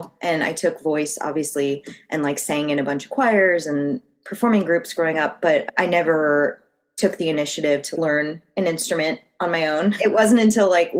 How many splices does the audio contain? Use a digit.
1